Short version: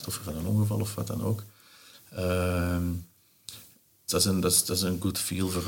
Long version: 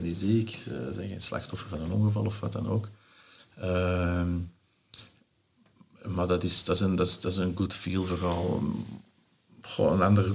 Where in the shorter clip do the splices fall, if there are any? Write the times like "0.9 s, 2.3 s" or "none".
4.1 s